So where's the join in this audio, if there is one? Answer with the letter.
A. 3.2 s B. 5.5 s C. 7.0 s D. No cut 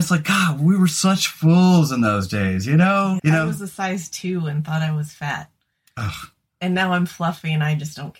A